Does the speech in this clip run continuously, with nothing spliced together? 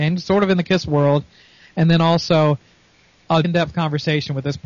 no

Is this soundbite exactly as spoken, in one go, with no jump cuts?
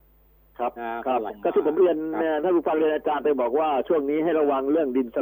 no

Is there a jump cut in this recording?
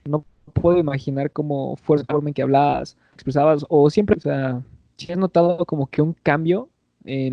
no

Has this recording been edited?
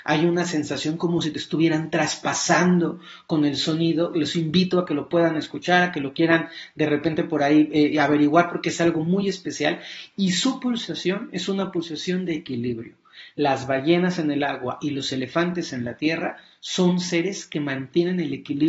no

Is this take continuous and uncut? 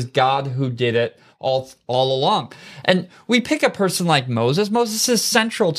yes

